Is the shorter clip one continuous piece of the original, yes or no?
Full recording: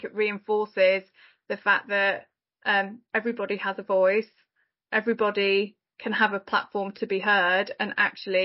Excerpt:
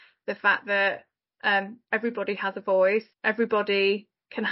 no